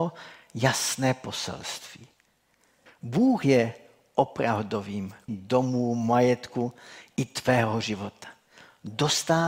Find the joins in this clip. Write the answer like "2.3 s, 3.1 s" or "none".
2.9 s, 5.3 s